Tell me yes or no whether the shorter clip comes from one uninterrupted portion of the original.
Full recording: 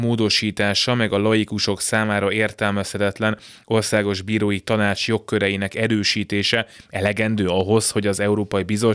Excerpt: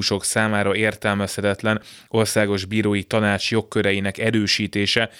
yes